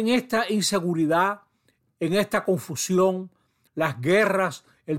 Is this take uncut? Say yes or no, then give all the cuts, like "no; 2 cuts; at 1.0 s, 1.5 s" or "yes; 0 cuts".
no; 1 cut; at 3.7 s